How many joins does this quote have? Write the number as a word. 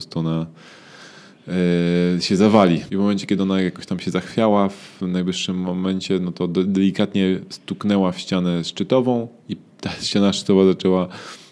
one